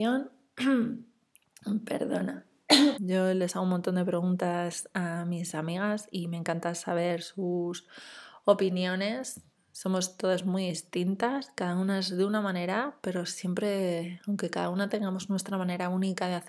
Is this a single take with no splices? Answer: no; 1 cut; at 3.0 s

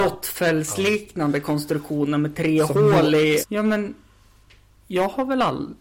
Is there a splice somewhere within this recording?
yes; 1 cut; at 3.4 s

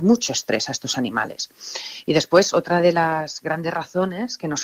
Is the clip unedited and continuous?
yes; 0 cuts

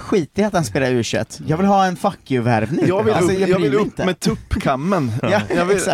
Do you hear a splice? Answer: yes; 1 cut; at 3.3 s

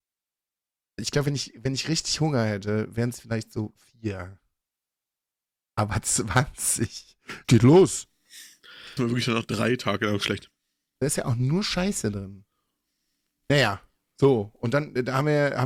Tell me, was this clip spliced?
yes; 3 cuts; at 7.4 s, 9.0 s, 11.0 s

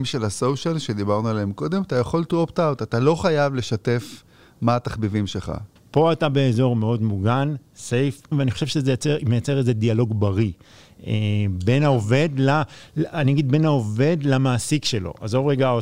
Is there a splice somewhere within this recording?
yes; 2 cuts; at 5.8 s, 8.3 s

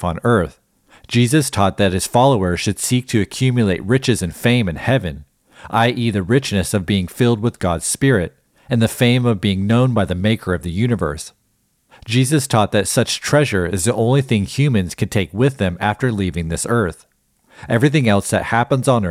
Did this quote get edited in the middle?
no; 0 cuts

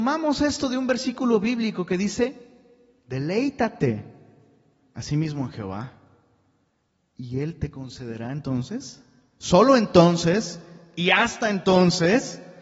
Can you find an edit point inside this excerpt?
no; 0 cuts

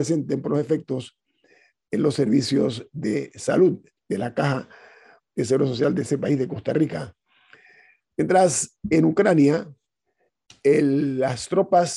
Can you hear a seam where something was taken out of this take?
no; 0 cuts

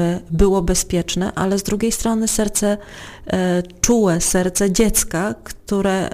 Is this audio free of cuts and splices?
yes; 0 cuts

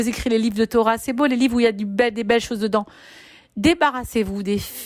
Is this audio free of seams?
yes; 0 cuts

